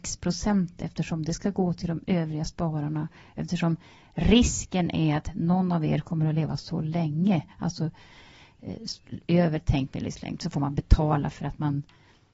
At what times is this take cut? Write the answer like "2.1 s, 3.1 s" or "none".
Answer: none